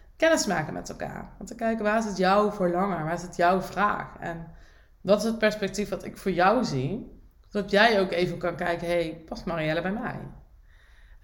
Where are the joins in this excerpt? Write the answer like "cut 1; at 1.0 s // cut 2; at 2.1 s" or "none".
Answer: none